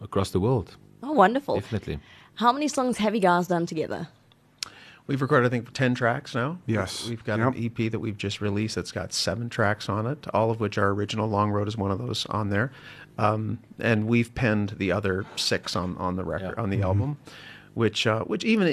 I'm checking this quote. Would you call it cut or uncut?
uncut